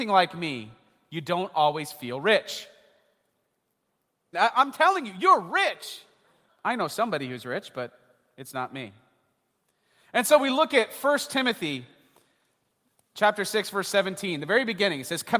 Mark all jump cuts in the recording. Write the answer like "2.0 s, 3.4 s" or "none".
4.3 s, 6.5 s